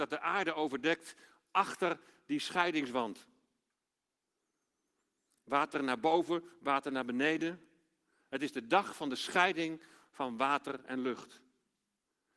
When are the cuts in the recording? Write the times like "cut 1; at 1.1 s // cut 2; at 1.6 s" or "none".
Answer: none